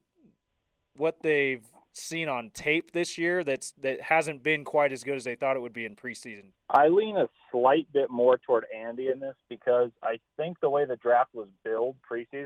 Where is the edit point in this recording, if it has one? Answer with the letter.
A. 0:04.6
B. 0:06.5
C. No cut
B